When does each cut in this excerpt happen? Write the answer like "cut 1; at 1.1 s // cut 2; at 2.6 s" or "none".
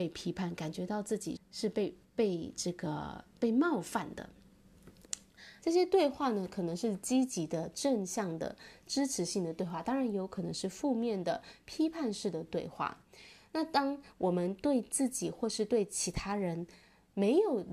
cut 1; at 1.4 s // cut 2; at 5.6 s